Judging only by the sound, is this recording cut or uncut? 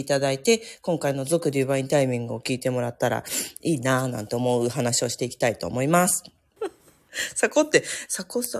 cut